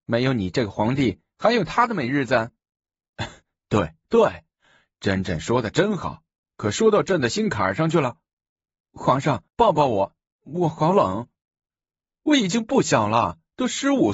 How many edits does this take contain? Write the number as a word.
two